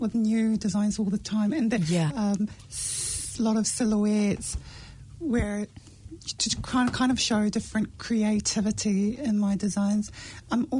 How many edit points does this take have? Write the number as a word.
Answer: one